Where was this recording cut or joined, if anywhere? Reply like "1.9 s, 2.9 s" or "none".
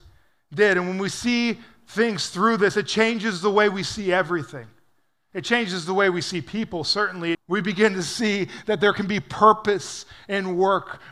7.3 s

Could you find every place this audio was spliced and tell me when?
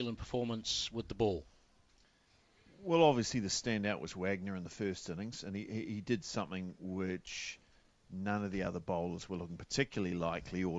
none

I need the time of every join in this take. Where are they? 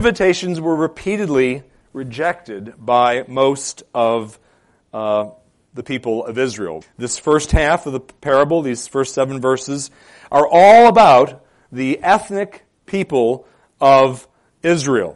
6.8 s

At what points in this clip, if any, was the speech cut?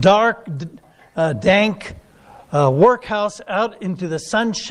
none

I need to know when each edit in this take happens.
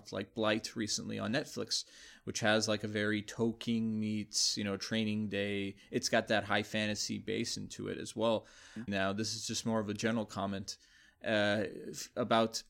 8.9 s

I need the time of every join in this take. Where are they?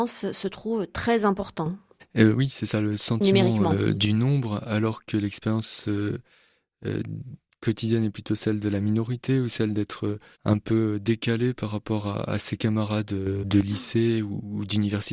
none

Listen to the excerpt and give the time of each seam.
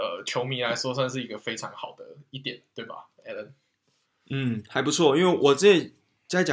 none

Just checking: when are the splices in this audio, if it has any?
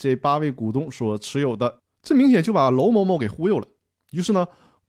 1.9 s

